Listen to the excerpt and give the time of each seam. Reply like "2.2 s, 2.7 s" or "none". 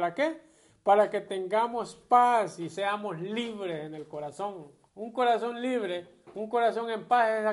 4.9 s